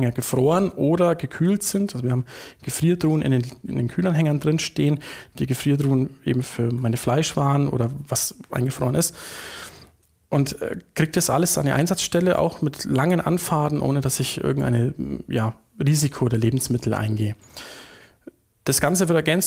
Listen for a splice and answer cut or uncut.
uncut